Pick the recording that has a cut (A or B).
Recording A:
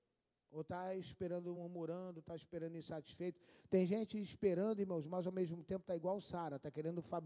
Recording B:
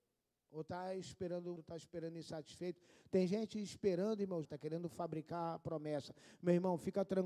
B